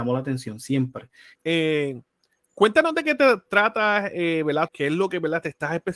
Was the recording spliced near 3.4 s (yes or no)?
no